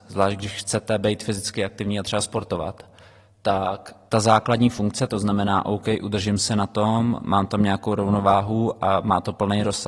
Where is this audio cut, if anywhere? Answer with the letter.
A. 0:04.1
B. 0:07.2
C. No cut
A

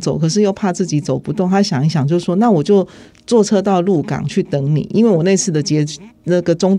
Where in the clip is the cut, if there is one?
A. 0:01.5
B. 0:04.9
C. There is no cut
C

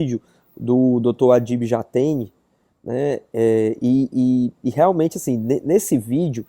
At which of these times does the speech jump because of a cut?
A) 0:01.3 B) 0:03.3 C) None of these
C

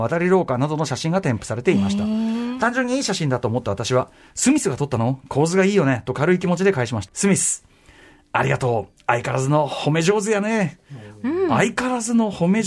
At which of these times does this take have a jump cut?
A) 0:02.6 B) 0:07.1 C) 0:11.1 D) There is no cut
B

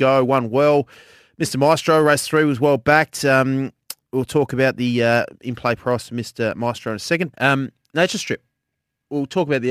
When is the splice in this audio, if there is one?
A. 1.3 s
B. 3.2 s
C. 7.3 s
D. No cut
C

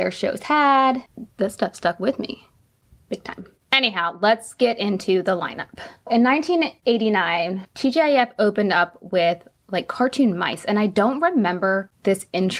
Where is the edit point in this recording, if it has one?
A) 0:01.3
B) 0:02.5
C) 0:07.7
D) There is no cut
D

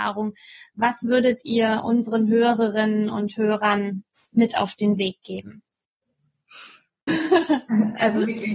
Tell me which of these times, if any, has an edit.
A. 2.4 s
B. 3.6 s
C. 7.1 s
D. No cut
C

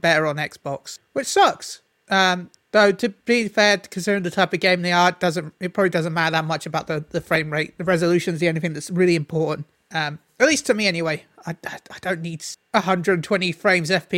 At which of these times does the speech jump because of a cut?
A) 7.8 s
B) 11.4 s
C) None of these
C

